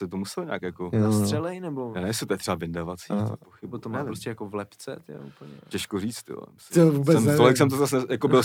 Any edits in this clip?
no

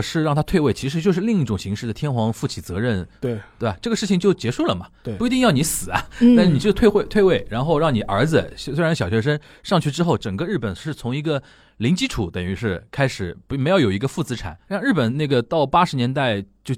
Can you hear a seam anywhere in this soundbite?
no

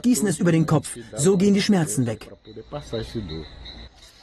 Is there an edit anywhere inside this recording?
no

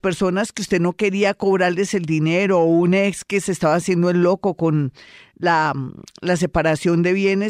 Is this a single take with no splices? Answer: yes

